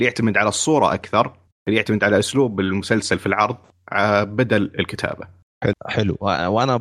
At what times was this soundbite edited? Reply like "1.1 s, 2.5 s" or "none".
5.7 s